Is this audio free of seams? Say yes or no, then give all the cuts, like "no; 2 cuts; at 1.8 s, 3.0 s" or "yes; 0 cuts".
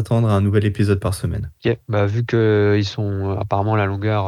no; 1 cut; at 1.6 s